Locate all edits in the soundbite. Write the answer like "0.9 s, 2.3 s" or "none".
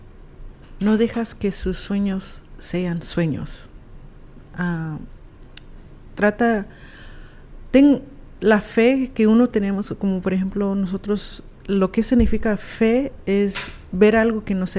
none